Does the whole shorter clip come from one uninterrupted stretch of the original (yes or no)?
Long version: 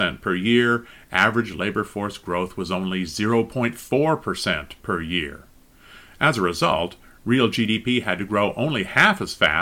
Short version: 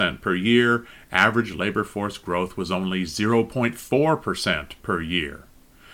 yes